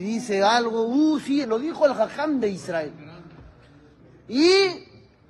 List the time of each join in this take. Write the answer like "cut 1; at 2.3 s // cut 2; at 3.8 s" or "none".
cut 1; at 1.4 s